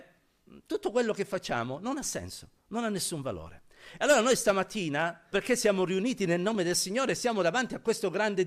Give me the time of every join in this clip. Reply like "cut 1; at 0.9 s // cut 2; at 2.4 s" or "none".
cut 1; at 5.3 s